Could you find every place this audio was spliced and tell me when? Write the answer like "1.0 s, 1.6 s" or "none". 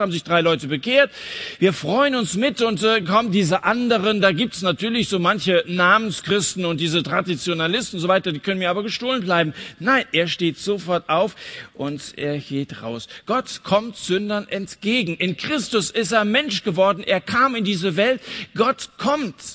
none